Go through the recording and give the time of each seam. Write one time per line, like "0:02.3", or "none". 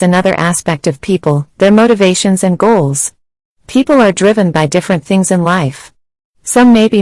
none